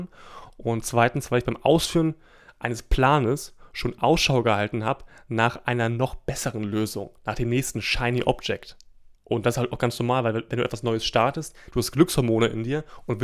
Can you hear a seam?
yes; 2 cuts; at 9.1 s, 11.7 s

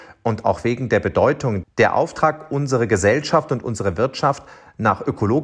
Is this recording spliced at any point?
yes; 1 cut; at 1.6 s

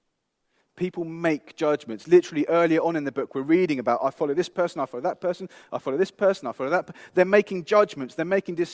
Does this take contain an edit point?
no; 0 cuts

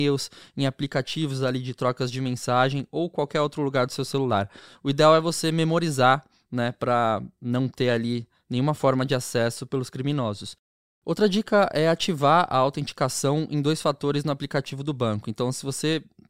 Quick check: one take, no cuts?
yes; 0 cuts

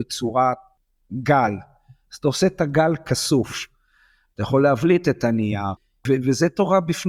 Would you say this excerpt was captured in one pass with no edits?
yes; 0 cuts

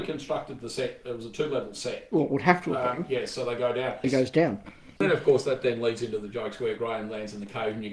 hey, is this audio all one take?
no; 1 cut; at 4.0 s

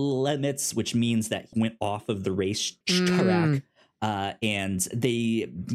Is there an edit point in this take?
yes; 2 cuts; at 1.5 s, 2.8 s

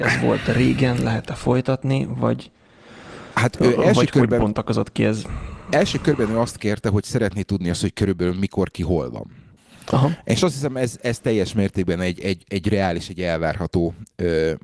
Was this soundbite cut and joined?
no; 0 cuts

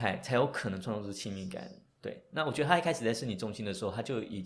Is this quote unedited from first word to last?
yes; 0 cuts

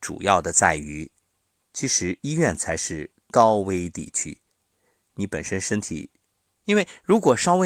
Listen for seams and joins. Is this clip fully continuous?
no; 1 cut; at 6.6 s

